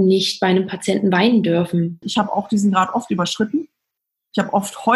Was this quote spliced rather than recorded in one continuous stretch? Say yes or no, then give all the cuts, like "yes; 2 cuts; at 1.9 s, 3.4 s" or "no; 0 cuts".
yes; 1 cut; at 2.0 s